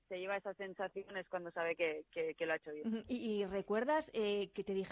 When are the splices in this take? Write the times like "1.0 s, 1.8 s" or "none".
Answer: none